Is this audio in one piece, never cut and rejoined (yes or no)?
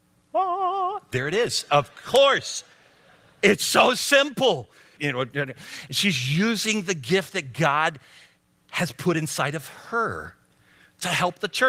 no